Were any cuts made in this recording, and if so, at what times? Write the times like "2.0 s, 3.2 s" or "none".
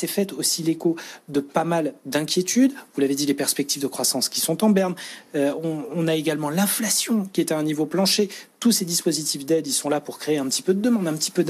none